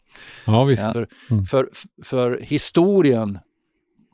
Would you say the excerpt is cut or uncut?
cut